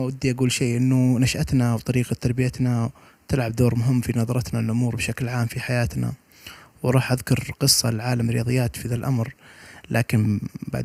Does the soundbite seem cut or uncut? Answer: uncut